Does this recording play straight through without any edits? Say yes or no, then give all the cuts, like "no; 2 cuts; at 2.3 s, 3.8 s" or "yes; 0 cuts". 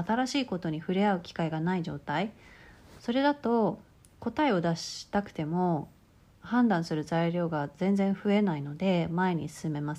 yes; 0 cuts